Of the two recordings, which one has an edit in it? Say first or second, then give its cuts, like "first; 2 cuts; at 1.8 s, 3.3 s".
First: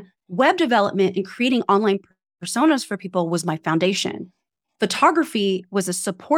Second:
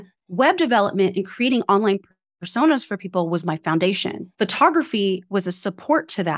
second; 1 cut; at 4.3 s